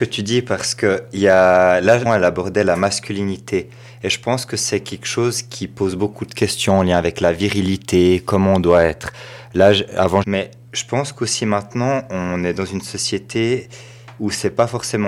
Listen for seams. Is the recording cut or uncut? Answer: cut